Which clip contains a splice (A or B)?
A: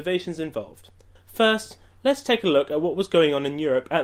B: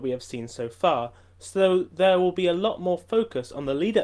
A